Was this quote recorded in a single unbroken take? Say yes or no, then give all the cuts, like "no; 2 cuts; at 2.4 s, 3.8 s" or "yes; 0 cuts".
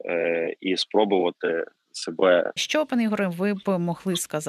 no; 1 cut; at 2.6 s